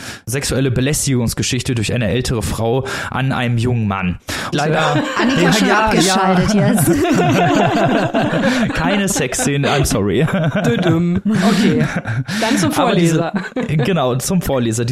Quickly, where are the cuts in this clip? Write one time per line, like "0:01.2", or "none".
0:04.5